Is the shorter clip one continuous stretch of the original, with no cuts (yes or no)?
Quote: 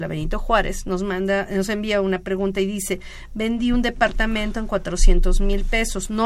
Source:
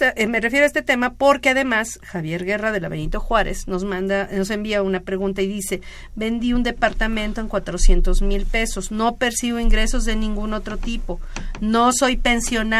yes